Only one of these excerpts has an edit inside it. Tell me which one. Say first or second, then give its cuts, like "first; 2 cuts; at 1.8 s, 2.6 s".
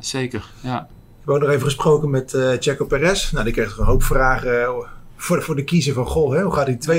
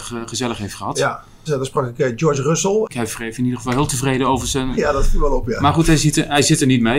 second; 3 cuts; at 1.5 s, 2.9 s, 4.7 s